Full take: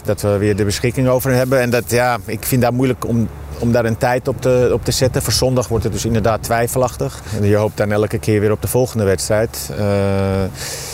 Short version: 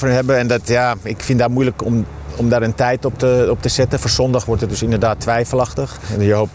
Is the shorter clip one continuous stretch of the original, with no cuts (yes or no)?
yes